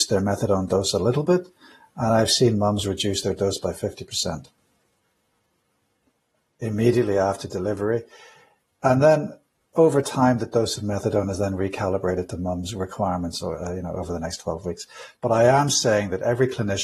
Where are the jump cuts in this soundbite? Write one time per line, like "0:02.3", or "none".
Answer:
0:15.2